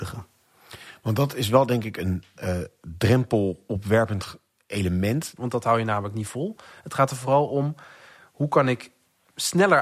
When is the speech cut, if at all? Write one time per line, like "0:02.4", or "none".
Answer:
0:05.4